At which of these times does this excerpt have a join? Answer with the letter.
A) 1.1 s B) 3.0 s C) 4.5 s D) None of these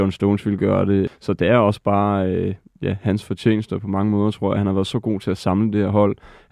A